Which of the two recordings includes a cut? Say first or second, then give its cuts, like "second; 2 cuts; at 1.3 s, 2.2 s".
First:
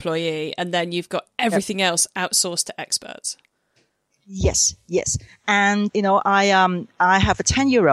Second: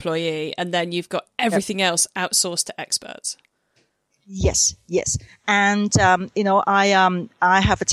first; 1 cut; at 5.9 s